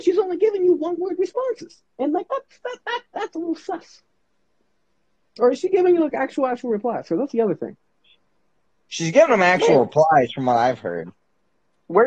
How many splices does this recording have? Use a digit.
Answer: 0